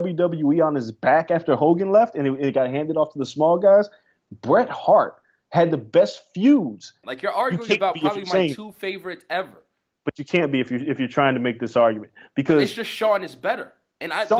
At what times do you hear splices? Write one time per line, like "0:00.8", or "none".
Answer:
0:07.0

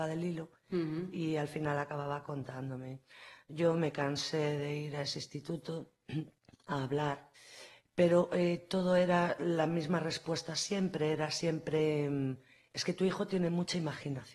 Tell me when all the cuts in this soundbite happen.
none

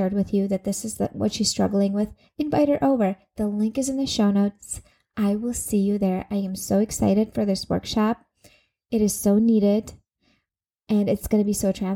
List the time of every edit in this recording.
none

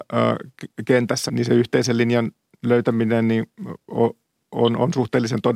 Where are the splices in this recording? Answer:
0:01.3

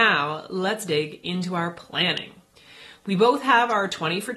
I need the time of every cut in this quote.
none

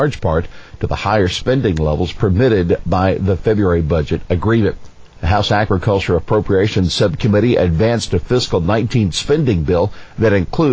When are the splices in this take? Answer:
0:05.1

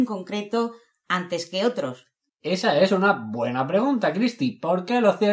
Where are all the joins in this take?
0:02.3

